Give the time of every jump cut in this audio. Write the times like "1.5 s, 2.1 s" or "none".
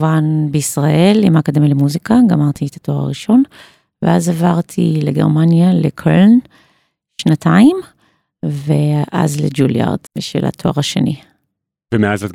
10.1 s